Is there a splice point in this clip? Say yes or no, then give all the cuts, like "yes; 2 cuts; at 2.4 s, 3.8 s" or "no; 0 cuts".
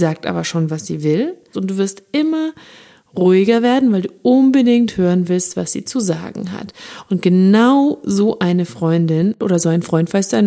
yes; 1 cut; at 1.5 s